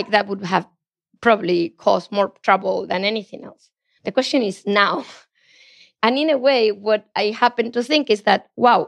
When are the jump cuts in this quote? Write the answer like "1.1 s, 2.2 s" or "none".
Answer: none